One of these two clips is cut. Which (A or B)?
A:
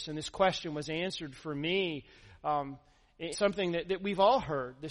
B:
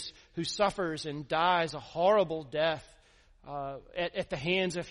A